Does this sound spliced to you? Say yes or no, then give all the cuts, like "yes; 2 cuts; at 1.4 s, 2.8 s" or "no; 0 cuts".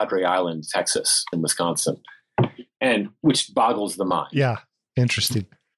yes; 1 cut; at 1.3 s